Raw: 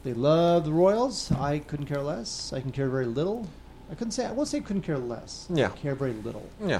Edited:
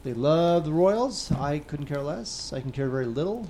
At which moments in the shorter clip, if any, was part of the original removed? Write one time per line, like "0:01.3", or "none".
none